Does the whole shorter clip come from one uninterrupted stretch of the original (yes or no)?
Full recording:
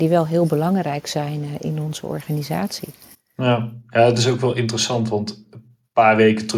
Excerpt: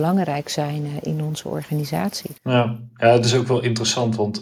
no